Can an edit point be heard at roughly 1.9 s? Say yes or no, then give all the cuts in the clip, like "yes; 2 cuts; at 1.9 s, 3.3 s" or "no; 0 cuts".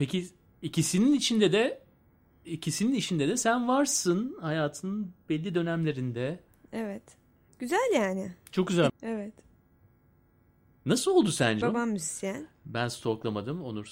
no; 3 cuts; at 7.5 s, 8.9 s, 11.6 s